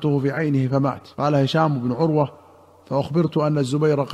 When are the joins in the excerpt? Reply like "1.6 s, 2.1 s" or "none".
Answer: 1.1 s